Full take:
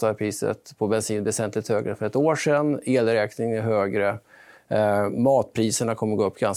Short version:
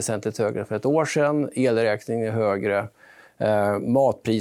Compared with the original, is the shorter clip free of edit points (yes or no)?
yes